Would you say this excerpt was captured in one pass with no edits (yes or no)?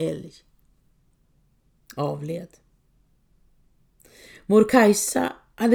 yes